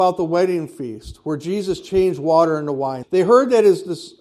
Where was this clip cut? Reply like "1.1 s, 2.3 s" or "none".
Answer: 3.0 s